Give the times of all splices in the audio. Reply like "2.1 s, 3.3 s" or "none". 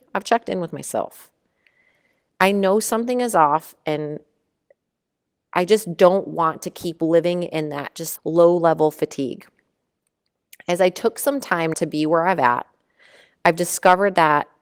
8.2 s, 11.7 s